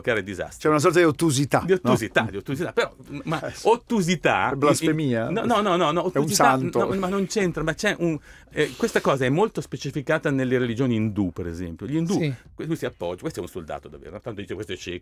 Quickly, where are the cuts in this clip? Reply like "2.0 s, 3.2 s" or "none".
12.4 s

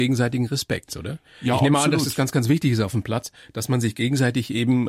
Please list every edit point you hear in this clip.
none

